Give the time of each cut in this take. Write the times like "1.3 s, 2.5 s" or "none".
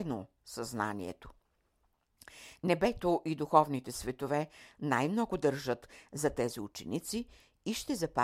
none